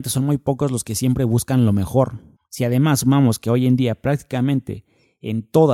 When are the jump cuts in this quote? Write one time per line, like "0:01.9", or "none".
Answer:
0:02.4